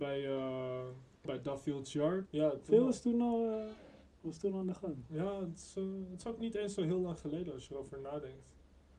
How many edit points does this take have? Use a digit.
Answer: 2